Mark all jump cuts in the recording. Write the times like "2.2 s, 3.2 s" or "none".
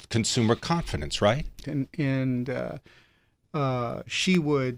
1.6 s